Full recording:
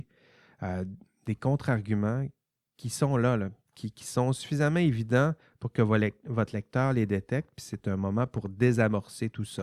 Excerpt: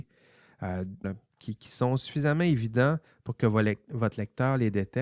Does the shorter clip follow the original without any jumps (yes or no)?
no